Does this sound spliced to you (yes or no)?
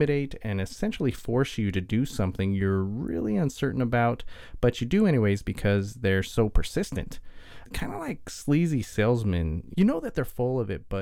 no